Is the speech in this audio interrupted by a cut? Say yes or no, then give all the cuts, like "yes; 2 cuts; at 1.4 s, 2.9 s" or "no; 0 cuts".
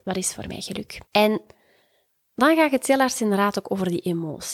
yes; 1 cut; at 1.1 s